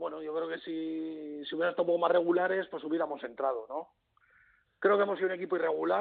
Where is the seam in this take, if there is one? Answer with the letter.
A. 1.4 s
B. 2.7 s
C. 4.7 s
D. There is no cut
C